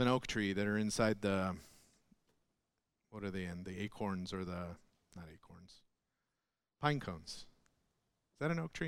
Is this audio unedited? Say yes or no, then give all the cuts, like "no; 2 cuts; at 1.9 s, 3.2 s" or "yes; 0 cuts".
yes; 0 cuts